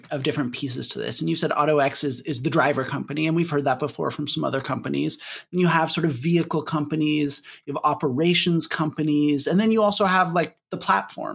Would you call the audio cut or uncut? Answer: uncut